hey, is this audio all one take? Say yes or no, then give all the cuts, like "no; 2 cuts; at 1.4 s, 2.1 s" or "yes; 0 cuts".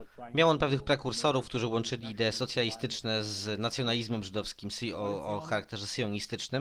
yes; 0 cuts